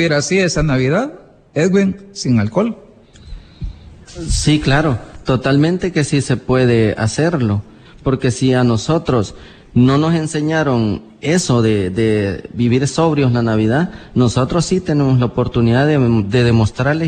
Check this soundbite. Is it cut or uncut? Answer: cut